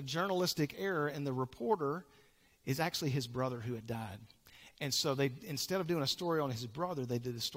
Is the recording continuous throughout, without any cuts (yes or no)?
yes